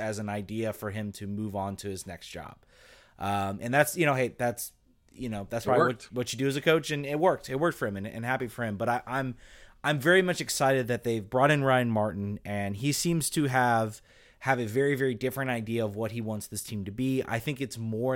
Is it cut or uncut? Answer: uncut